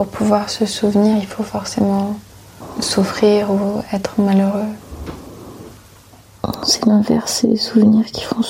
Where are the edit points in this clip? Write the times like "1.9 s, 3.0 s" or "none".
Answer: none